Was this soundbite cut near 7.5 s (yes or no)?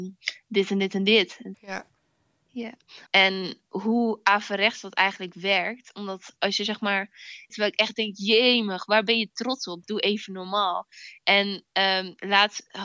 yes